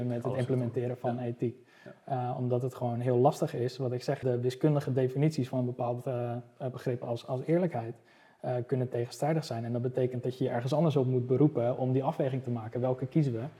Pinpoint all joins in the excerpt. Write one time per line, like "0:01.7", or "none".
0:04.2